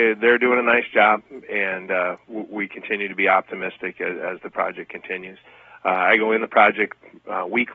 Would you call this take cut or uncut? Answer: uncut